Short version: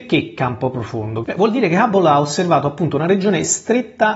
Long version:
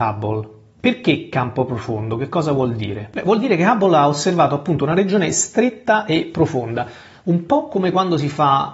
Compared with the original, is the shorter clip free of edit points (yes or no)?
no